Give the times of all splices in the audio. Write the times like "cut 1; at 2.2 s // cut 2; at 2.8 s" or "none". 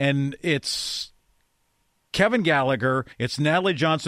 cut 1; at 3.1 s